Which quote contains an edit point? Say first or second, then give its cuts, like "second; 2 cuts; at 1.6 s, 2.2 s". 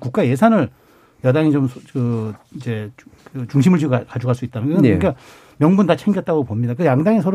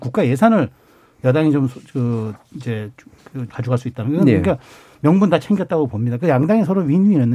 second; 1 cut; at 3.5 s